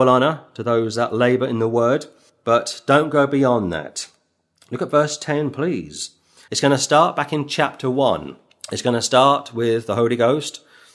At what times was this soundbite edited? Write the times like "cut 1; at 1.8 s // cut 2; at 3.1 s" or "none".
cut 1; at 6.5 s